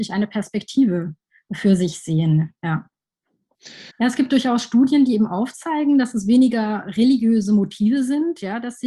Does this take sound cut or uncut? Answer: cut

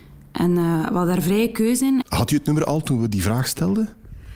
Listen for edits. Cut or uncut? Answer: cut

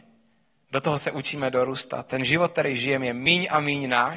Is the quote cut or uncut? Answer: uncut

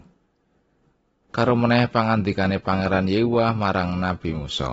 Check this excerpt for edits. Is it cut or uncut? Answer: uncut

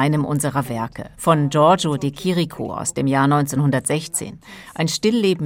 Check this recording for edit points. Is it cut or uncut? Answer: cut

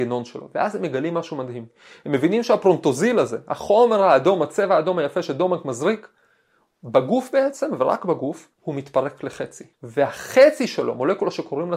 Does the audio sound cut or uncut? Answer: cut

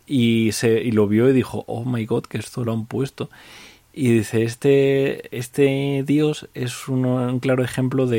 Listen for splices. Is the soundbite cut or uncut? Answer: cut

